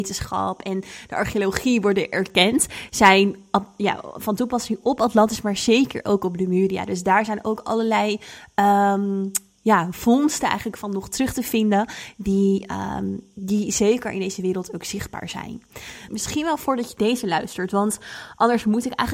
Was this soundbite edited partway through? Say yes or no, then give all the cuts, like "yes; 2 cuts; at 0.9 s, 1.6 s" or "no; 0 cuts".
yes; 1 cut; at 16.1 s